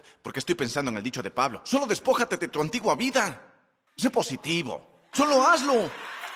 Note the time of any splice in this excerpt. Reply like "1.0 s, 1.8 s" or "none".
3.9 s, 5.1 s